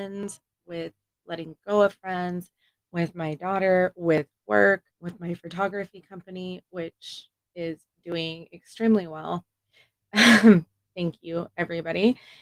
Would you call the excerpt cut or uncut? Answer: cut